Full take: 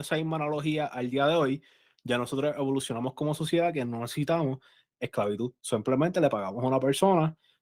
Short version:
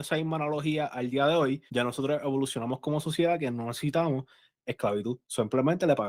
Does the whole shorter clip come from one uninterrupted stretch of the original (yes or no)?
no